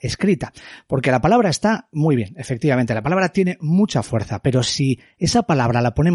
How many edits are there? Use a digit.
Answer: 0